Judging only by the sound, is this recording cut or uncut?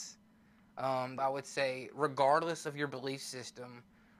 cut